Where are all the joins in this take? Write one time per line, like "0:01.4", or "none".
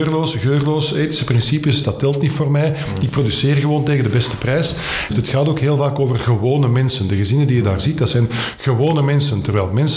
0:05.1